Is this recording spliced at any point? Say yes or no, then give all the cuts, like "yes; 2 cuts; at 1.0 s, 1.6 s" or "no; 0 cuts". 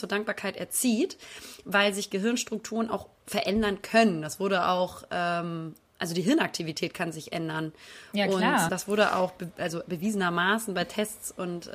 yes; 1 cut; at 8.7 s